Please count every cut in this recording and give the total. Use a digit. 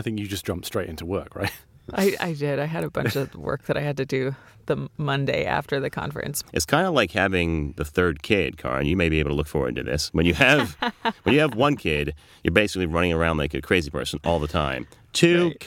1